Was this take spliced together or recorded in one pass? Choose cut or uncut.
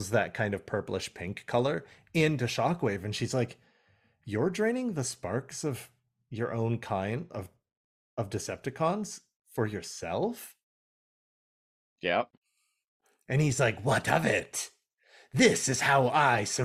uncut